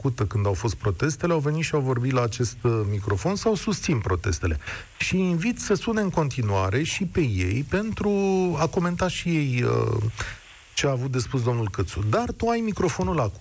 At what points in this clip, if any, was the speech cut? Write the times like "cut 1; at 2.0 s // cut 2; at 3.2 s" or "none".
none